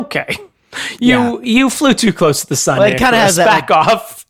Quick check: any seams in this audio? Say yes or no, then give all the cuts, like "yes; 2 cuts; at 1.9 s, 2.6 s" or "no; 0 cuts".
no; 0 cuts